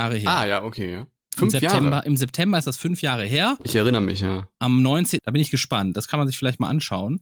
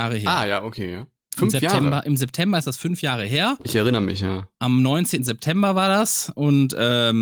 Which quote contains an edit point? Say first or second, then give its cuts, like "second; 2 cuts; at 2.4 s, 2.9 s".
first; 1 cut; at 5.2 s